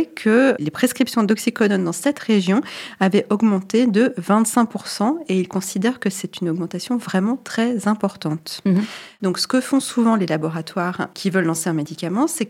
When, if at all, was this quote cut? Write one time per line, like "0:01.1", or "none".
0:08.7